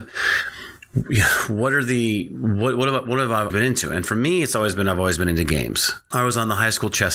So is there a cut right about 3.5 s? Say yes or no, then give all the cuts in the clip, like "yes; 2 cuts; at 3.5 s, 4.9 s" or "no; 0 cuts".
yes; 2 cuts; at 3.5 s, 6.1 s